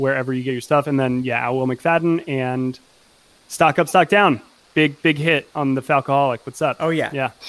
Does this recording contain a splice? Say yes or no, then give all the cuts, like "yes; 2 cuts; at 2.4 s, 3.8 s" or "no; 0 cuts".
no; 0 cuts